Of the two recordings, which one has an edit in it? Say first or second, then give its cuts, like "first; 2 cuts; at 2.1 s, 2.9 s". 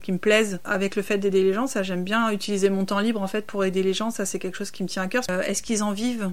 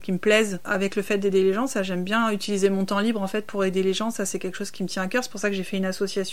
first; 1 cut; at 5.3 s